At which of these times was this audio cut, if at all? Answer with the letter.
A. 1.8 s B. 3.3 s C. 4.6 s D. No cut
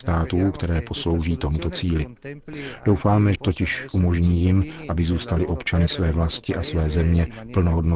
B